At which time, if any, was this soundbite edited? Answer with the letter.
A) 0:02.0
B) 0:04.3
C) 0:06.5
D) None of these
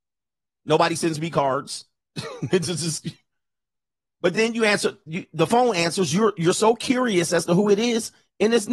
D